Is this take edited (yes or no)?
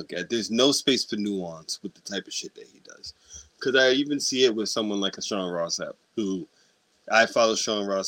yes